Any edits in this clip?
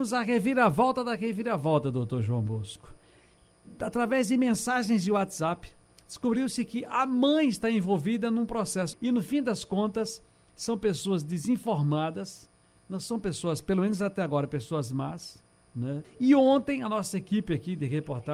yes; 2 cuts; at 8.9 s, 16.0 s

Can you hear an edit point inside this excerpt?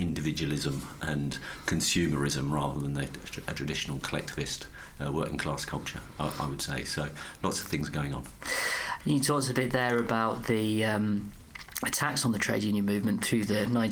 no; 0 cuts

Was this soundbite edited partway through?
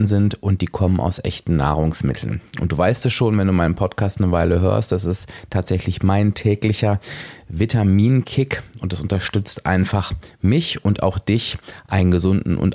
no; 0 cuts

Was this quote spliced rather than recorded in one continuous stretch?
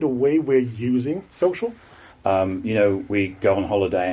yes; 1 cut; at 2.1 s

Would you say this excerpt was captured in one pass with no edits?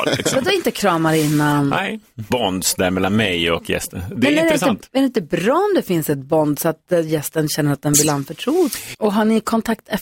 no; 2 cuts; at 2.3 s, 8.9 s

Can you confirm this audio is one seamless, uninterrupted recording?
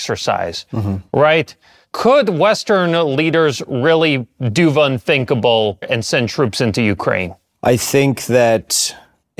no; 1 cut; at 5.8 s

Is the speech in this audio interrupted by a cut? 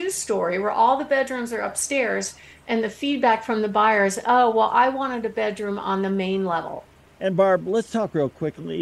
yes; 1 cut; at 7.1 s

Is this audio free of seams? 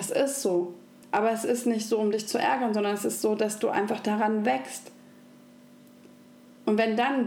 yes; 0 cuts

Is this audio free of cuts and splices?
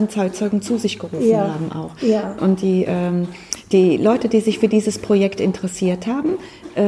yes; 0 cuts

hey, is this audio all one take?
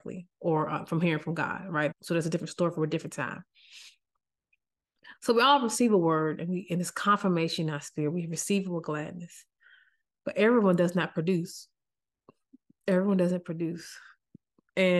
no; 1 cut; at 1.9 s

